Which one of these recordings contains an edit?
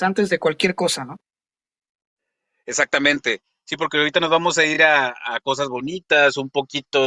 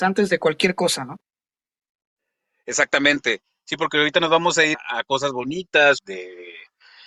second; 2 cuts; at 4.7 s, 6.0 s

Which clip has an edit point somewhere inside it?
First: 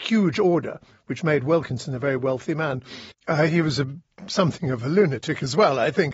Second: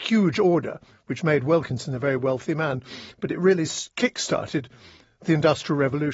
first; 1 cut; at 3.1 s

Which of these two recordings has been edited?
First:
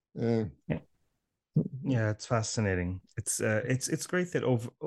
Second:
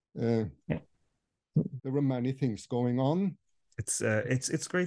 second; 2 cuts; at 1.8 s, 3.7 s

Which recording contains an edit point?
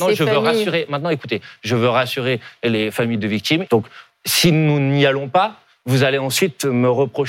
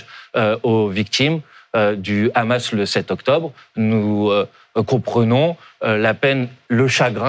first; 1 cut; at 3.7 s

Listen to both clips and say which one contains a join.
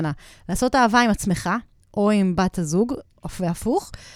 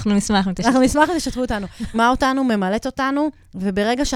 second; 1 cut; at 1.9 s

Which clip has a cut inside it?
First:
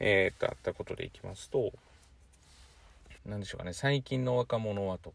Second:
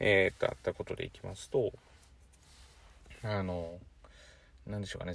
first; 1 cut; at 3.2 s

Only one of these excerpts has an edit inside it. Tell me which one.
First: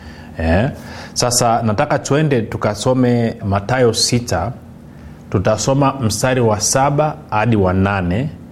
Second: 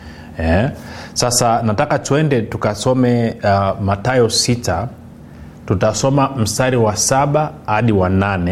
first; 1 cut; at 3.4 s

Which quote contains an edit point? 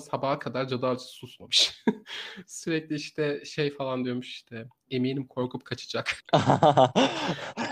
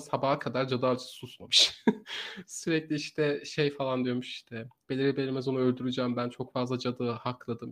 first; 1 cut; at 4.9 s

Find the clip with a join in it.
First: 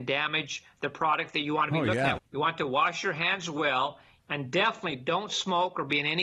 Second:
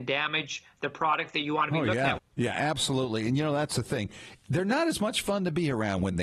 first; 2 cuts; at 2.2 s, 4.2 s

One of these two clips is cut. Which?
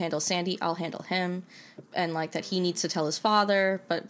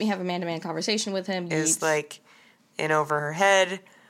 second; 1 cut; at 1.5 s

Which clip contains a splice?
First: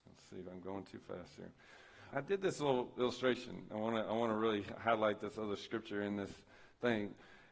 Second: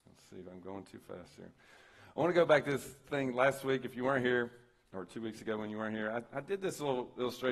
first; 2 cuts; at 2.1 s, 3.7 s

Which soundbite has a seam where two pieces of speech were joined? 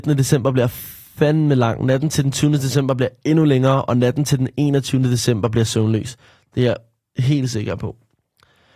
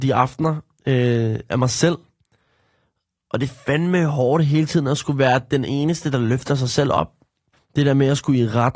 second; 1 cut; at 7.5 s

